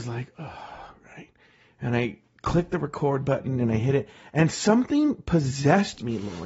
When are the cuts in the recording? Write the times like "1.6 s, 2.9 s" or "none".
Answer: none